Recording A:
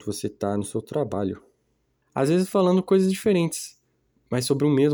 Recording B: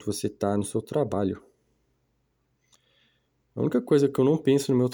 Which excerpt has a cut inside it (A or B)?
A